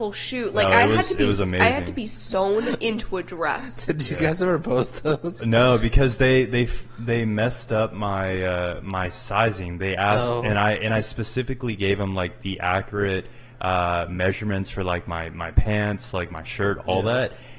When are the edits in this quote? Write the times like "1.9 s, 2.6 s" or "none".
none